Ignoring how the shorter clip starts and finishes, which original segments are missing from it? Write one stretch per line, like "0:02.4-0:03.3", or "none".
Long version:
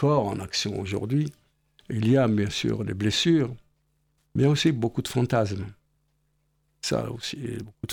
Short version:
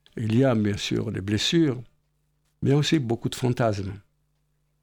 none

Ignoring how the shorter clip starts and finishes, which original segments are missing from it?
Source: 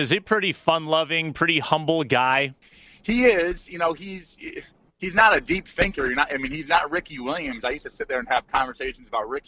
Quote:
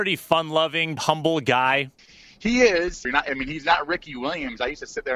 0:01.3-0:01.6
0:03.7-0:06.1

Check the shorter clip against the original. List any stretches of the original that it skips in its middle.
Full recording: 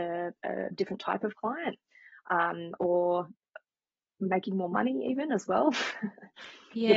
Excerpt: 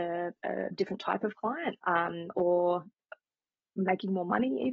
0:01.8-0:02.2

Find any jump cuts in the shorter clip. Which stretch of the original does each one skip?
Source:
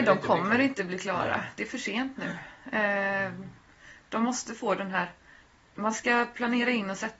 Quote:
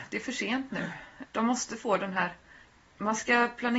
0:02.7-0:04.0

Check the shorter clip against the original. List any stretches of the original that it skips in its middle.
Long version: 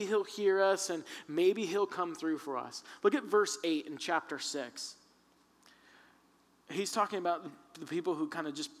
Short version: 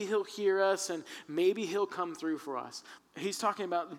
0:03.0-0:06.5

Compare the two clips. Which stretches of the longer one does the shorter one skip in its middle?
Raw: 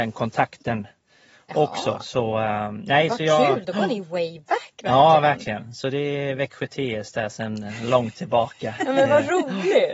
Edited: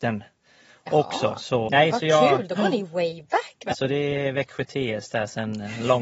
0:02.3-0:02.8
0:04.9-0:05.7

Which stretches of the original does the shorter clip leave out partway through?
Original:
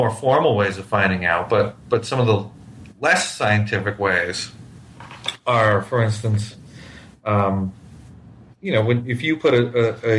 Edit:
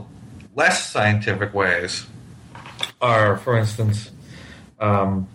none

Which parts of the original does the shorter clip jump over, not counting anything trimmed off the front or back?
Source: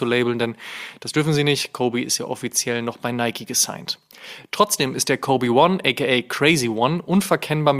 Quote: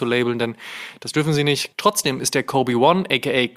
0:01.7-0:04.5

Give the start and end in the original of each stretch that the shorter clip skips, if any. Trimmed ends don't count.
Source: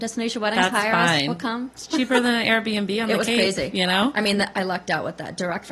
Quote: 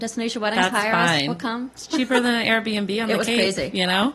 none

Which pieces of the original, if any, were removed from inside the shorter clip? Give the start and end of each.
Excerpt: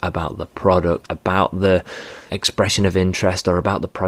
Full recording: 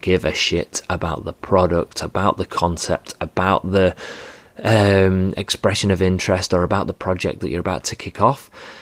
0:01.9-0:03.2
0:04.4-0:05.3

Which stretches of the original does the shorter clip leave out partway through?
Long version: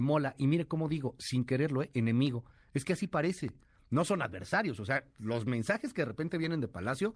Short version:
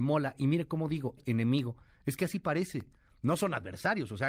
0:01.2-0:01.8

